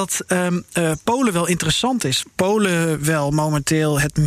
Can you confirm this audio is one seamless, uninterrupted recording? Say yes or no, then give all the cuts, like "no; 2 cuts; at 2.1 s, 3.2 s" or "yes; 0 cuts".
no; 1 cut; at 2.2 s